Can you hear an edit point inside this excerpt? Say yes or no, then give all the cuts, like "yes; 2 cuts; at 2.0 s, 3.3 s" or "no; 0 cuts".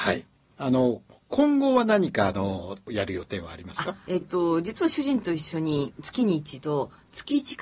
no; 0 cuts